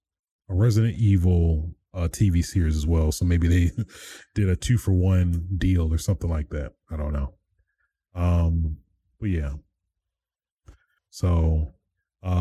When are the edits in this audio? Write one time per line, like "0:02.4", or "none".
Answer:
0:11.0